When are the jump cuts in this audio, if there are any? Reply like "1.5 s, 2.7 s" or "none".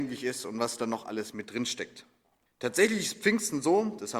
2.5 s